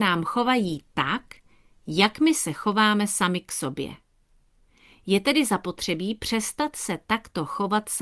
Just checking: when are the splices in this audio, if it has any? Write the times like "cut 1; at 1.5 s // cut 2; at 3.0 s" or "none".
none